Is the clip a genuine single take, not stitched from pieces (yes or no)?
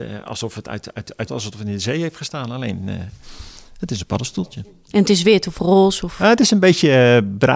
no